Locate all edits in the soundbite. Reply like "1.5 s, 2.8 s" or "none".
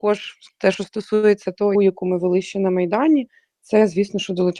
1.7 s

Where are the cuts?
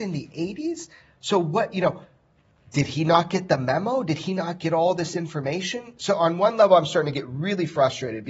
none

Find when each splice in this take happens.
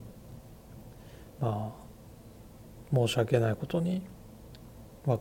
1.4 s

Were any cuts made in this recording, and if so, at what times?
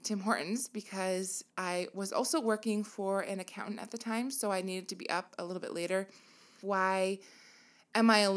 6.6 s

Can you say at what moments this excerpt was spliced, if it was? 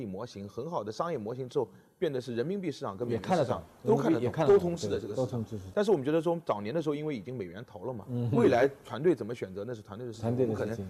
none

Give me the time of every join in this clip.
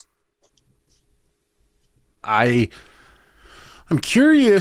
2.2 s

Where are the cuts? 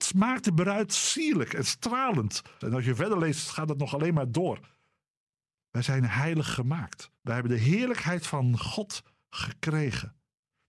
2.6 s, 7.2 s

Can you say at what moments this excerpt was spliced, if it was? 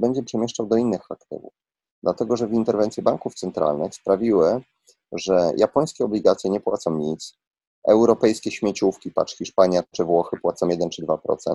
none

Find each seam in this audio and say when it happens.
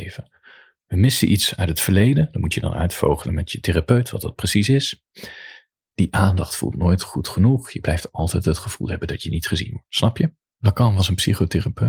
5.9 s, 10.4 s

